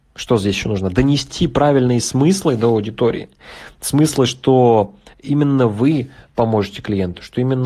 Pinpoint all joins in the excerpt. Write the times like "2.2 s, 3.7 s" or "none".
none